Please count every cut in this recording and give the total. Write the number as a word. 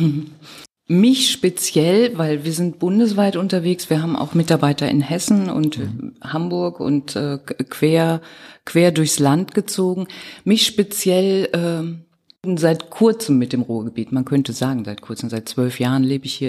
zero